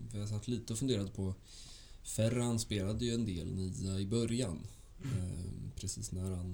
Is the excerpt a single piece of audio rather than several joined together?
yes; 0 cuts

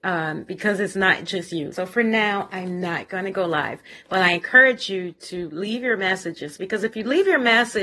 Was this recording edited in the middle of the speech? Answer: yes; 1 cut; at 1.7 s

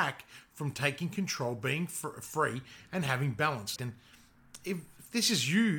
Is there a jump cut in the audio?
yes; 1 cut; at 3.8 s

